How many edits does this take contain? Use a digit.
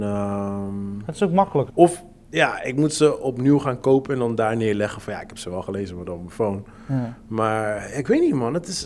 1